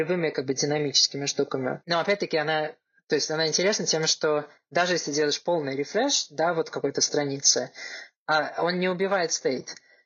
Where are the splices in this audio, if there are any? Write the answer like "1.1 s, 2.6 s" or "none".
1.8 s